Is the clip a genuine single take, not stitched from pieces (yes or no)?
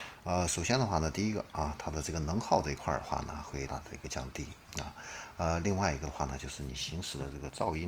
no